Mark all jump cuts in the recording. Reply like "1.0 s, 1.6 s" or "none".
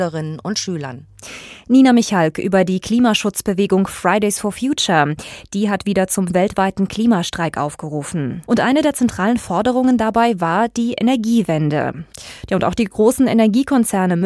8.5 s

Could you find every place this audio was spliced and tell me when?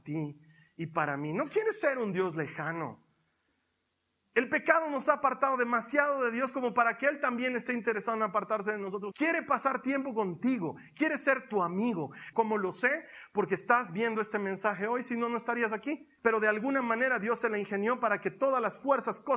9.1 s, 12.3 s, 16.2 s

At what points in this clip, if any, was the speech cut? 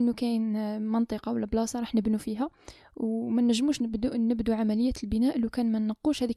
none

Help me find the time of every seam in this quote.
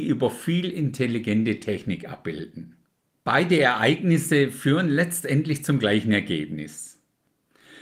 3.1 s

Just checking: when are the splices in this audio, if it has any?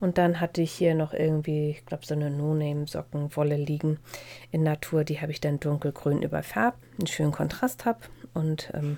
6.8 s

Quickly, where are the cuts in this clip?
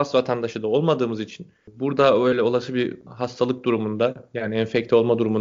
none

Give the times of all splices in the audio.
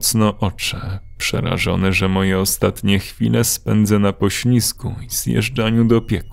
none

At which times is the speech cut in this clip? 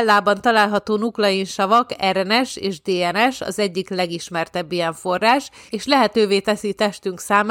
5.7 s

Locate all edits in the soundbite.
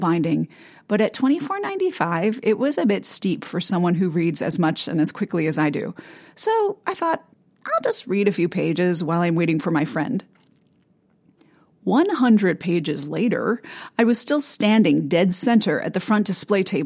none

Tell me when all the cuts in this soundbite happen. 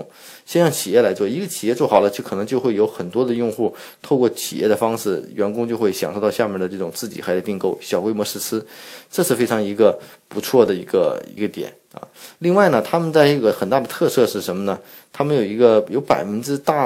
11.4 s

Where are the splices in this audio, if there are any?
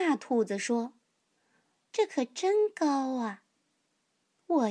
1.9 s

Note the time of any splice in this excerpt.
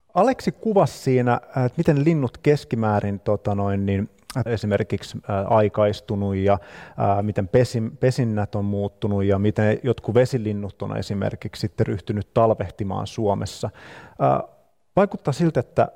4.5 s

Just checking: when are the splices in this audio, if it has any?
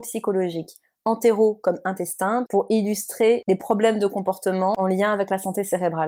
2.5 s

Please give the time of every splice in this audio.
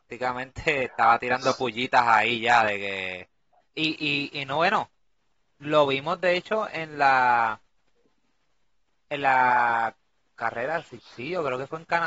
3.6 s

